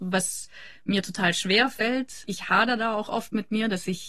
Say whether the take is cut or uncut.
uncut